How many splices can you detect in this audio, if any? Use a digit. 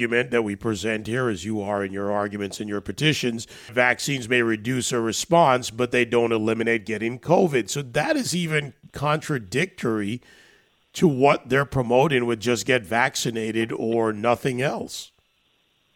1